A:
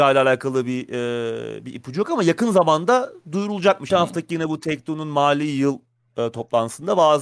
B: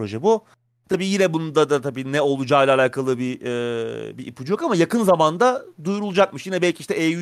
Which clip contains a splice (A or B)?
A